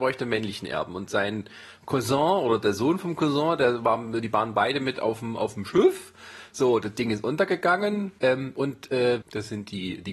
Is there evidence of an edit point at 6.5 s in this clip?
no; 2 cuts; at 8.2 s, 9.2 s

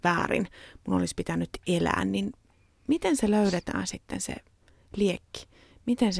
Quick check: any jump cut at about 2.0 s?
no; 0 cuts

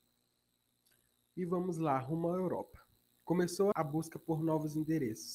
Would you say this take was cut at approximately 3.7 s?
yes; 1 cut; at 3.7 s

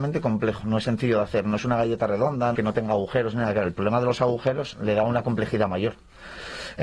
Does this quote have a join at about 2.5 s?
yes; 1 cut; at 2.5 s

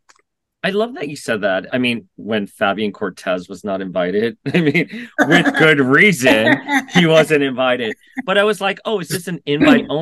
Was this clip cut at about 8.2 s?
no; 1 cut; at 1.7 s

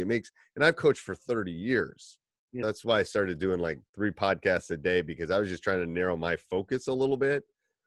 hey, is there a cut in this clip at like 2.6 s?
yes; 2 cuts; at 2.6 s, 3.9 s

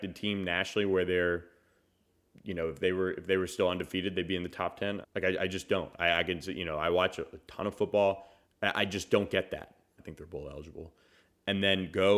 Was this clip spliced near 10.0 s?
yes; 3 cuts; at 5.0 s, 8.4 s, 10.0 s

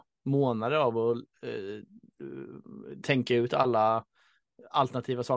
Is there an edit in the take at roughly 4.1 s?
no; 0 cuts

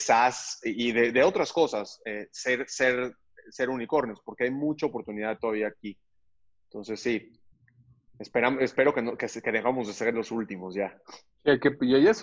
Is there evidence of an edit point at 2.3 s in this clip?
no; 0 cuts

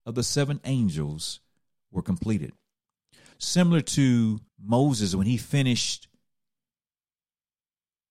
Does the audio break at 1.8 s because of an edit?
no; 2 cuts; at 3.3 s, 4.5 s

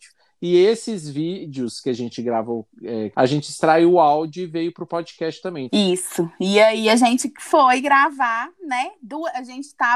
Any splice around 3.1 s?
yes; 2 cuts; at 3.1 s, 5.7 s

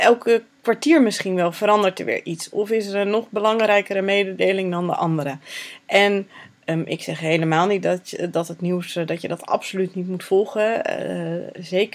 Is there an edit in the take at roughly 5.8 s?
no; 0 cuts

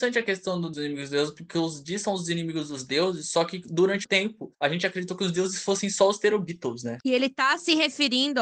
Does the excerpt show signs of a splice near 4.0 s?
yes; 2 cuts; at 4.0 s, 7.0 s

